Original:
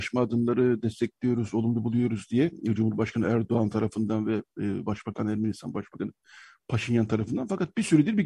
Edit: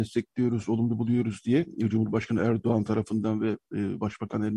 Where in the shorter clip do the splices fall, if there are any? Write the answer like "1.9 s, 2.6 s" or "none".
none